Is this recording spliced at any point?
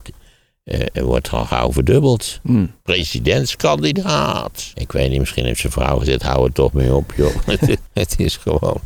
yes; 3 cuts; at 1.0 s, 4.7 s, 7.9 s

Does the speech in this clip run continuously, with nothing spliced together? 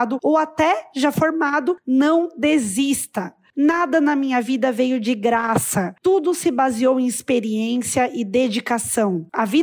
no; 1 cut; at 3.5 s

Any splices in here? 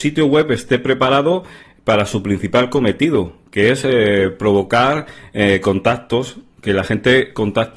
no; 0 cuts

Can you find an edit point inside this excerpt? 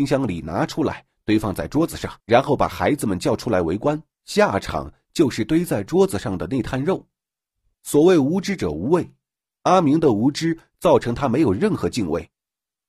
yes; 3 cuts; at 2.2 s, 4.1 s, 7.7 s

